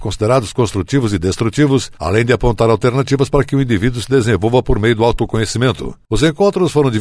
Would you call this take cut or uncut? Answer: uncut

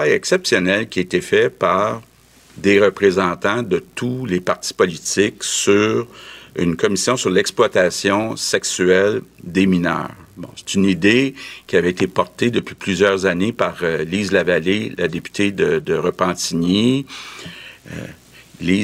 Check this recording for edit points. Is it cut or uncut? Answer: uncut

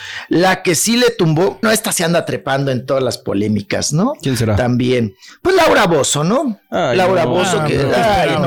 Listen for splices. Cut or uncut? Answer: cut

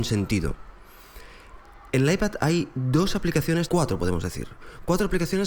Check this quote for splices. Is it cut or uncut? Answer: cut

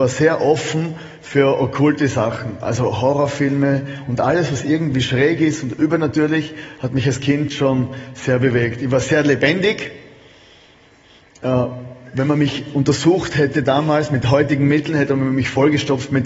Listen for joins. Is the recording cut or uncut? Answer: uncut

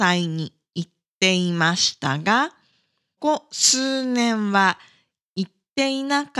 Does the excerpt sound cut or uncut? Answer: cut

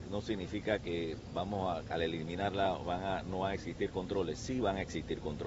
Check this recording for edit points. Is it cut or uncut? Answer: uncut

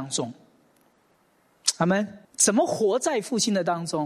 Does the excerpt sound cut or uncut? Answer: cut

